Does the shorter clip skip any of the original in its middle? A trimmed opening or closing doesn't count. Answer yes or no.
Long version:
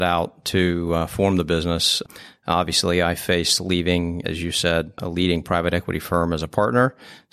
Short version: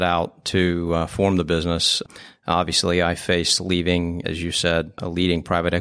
no